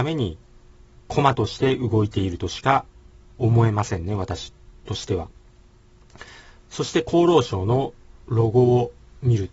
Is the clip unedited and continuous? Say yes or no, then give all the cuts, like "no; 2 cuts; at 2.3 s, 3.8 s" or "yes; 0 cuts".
yes; 0 cuts